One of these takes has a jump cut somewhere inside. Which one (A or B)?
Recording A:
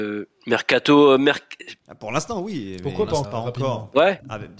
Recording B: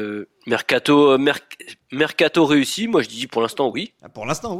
A